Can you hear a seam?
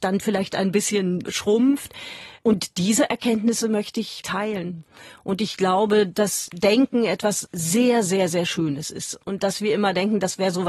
no; 0 cuts

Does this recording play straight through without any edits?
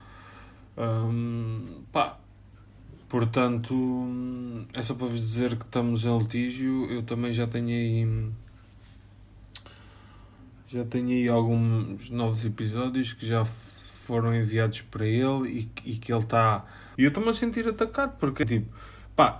no; 2 cuts; at 17.0 s, 18.4 s

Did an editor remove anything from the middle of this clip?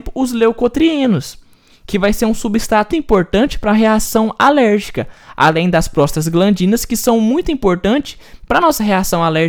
yes; 1 cut; at 2.9 s

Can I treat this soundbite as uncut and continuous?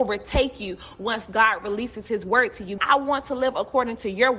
no; 1 cut; at 2.8 s

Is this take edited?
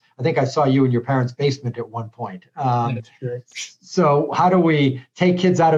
no; 0 cuts

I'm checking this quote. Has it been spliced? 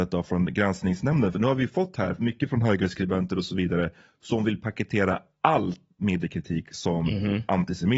no; 0 cuts

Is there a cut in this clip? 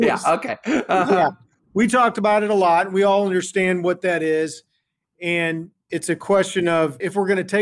no; 0 cuts

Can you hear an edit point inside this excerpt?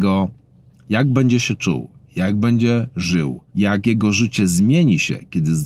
yes; 1 cut; at 3.5 s

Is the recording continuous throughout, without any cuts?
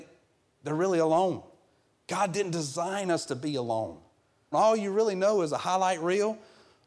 no; 1 cut; at 4.5 s

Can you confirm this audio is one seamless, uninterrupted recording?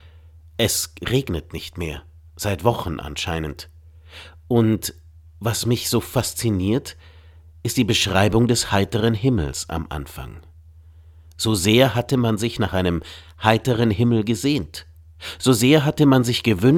yes; 0 cuts

